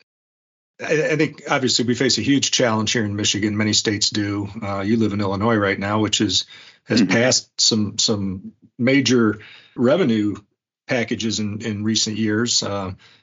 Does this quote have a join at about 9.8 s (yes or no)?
yes